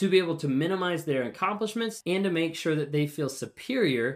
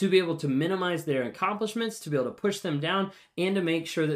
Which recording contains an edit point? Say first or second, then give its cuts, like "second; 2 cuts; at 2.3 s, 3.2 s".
first; 1 cut; at 2.0 s